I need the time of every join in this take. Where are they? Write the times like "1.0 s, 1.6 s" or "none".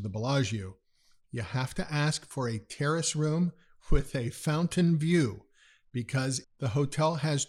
6.4 s